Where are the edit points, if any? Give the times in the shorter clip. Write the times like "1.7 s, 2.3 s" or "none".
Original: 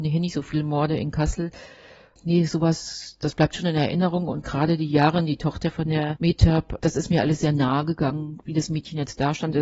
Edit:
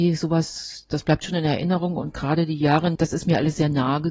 3.0 s